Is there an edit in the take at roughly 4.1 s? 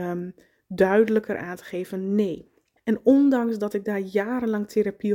no; 1 cut; at 2.8 s

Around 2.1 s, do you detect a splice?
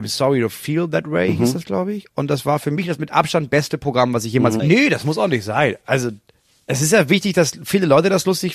no; 1 cut; at 4.6 s

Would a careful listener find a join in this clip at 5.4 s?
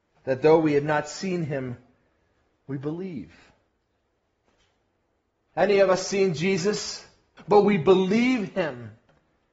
no; 1 cut; at 7.4 s

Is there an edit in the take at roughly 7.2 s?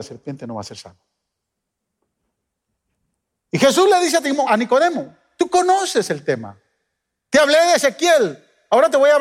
no; 1 cut; at 4.5 s

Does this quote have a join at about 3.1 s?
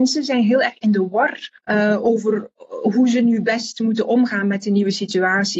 no; 1 cut; at 1.6 s

